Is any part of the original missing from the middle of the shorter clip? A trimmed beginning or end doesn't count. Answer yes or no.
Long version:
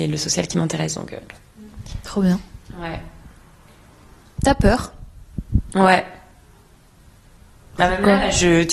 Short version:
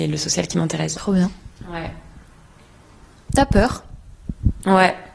yes